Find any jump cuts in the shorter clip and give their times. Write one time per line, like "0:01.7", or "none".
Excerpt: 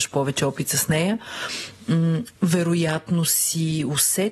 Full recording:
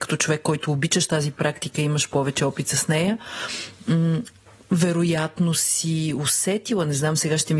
0:02.4